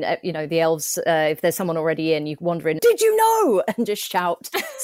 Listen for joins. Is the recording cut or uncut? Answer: cut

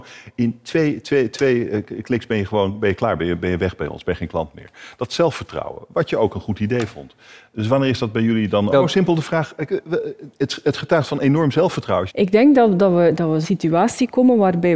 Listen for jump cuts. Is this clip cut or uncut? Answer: cut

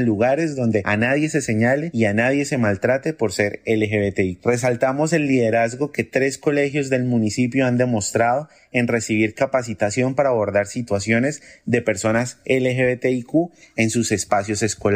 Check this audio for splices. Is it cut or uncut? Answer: uncut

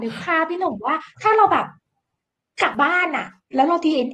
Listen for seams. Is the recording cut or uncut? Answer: cut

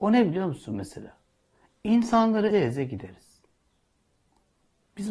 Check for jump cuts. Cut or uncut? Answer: cut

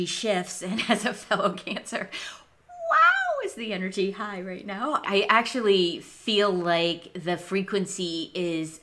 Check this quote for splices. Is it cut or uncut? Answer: cut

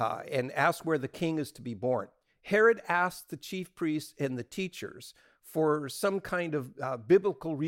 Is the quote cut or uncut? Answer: uncut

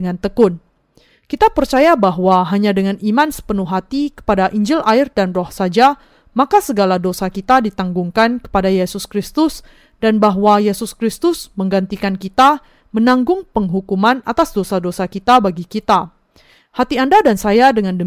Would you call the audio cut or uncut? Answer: uncut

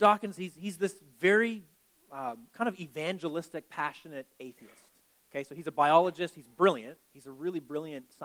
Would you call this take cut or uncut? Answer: uncut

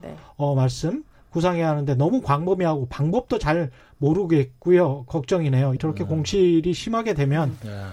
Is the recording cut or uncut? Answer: cut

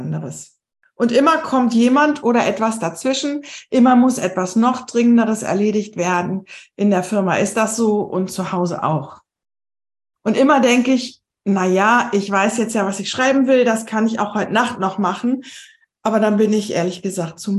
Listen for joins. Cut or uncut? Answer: uncut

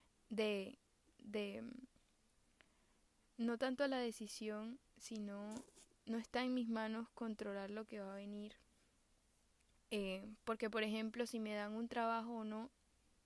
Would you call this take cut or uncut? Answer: uncut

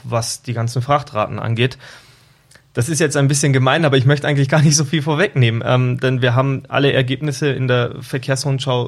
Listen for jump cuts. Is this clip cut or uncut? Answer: uncut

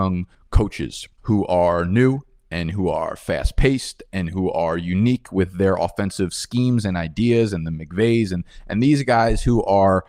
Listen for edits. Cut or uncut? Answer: uncut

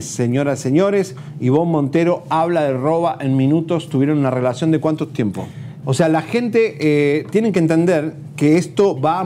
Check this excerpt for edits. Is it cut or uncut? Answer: cut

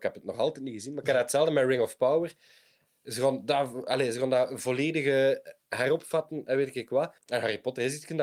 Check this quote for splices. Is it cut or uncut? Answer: cut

